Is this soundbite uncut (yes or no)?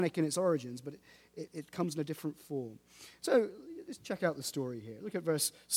yes